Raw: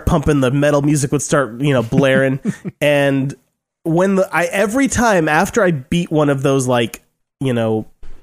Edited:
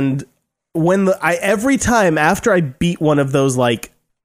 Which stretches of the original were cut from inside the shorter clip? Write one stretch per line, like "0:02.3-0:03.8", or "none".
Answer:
none